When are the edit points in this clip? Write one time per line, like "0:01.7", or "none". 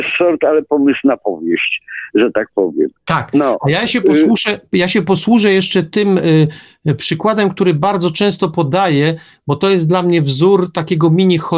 none